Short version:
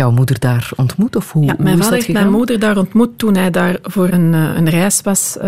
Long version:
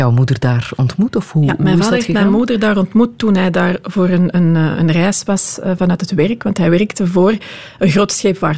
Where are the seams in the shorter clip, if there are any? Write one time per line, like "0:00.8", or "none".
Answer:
0:04.1